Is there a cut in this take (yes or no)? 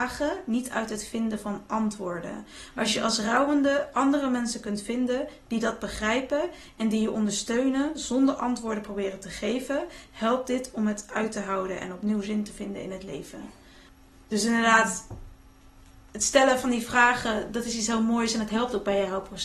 no